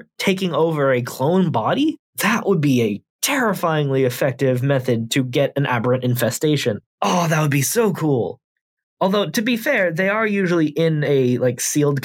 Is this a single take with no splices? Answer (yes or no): yes